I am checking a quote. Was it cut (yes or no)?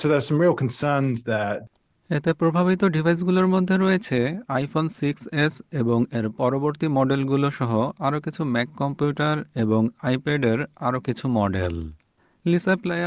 no